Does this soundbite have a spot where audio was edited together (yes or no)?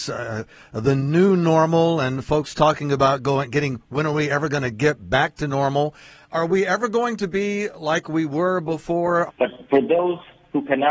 yes